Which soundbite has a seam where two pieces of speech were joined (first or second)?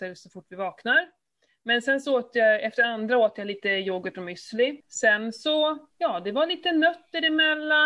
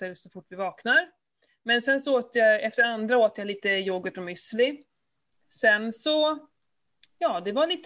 first